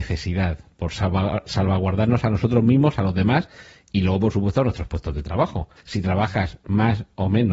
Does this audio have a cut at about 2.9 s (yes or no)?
no